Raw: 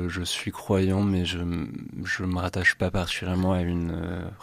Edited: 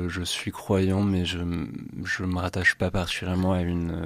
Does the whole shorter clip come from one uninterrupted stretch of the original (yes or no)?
yes